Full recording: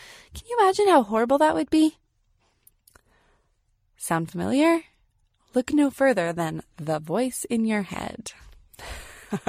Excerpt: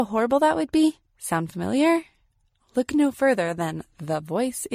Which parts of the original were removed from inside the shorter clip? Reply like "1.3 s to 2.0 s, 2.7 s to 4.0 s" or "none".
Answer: 2.0 s to 3.8 s